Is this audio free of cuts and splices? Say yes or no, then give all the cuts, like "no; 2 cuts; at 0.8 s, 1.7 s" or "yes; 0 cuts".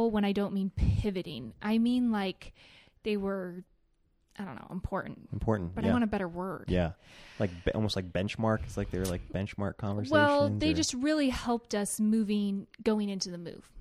yes; 0 cuts